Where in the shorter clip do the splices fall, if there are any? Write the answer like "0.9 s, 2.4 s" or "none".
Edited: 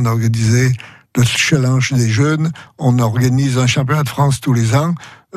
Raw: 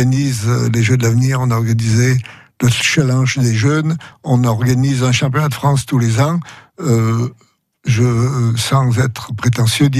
none